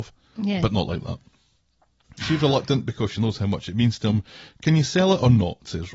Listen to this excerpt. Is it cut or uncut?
cut